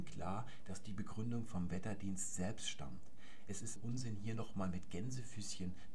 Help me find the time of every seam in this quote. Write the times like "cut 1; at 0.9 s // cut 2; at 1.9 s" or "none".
cut 1; at 3.8 s